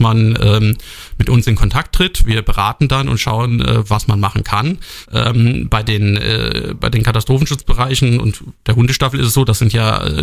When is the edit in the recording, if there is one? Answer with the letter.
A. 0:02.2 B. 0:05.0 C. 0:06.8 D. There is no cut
B